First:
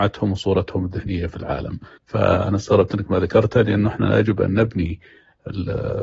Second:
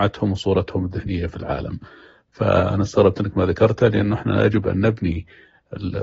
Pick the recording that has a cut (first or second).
first